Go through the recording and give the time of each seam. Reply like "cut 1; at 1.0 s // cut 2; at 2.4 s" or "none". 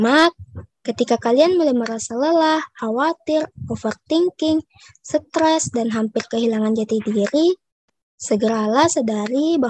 none

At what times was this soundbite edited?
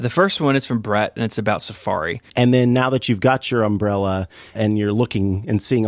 cut 1; at 2.3 s // cut 2; at 4.6 s

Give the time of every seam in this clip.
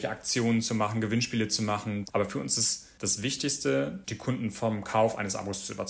cut 1; at 2.1 s // cut 2; at 4.0 s

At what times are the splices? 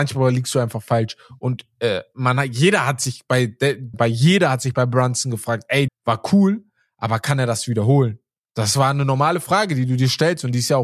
cut 1; at 3.9 s // cut 2; at 5.9 s

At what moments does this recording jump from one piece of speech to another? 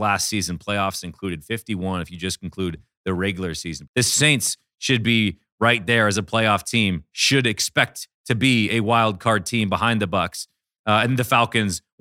cut 1; at 3.9 s

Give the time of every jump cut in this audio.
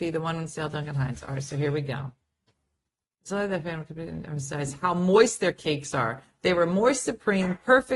none

